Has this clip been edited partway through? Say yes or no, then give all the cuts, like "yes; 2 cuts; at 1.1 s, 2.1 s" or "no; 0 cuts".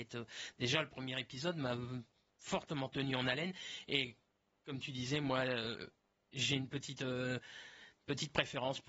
no; 0 cuts